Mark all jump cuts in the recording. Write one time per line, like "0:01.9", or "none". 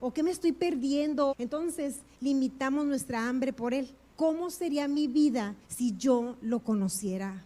0:01.3
0:04.1
0:05.6